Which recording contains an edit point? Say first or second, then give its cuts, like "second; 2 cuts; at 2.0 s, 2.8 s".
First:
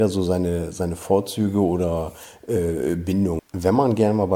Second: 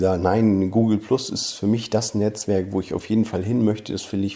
first; 1 cut; at 3.4 s